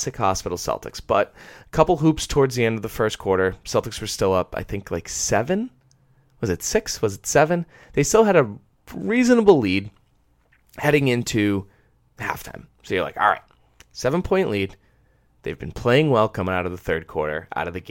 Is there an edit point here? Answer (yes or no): no